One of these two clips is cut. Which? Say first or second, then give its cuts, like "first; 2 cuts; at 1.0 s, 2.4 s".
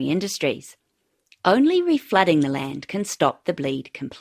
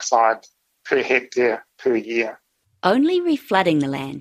first; 1 cut; at 1.4 s